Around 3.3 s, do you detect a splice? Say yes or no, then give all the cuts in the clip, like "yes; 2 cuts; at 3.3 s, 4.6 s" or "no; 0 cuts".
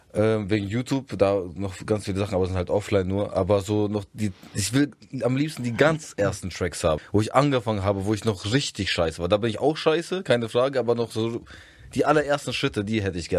no; 1 cut; at 7.0 s